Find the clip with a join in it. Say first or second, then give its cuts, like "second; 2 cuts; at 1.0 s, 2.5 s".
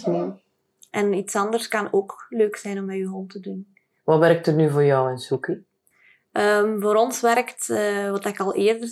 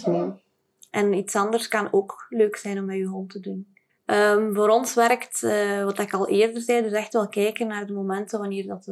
second; 1 cut; at 3.9 s